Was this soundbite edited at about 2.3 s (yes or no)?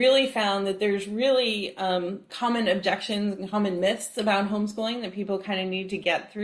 yes